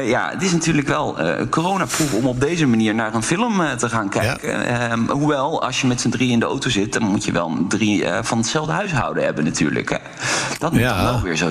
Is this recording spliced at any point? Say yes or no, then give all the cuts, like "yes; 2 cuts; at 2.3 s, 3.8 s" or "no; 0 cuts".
no; 0 cuts